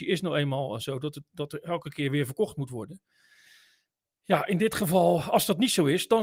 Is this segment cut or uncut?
uncut